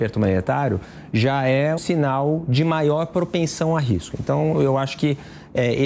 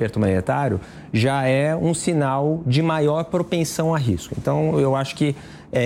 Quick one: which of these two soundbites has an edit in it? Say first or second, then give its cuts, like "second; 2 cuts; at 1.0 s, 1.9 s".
first; 1 cut; at 1.8 s